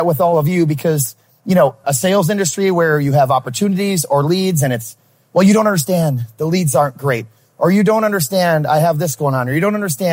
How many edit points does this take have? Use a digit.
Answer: 1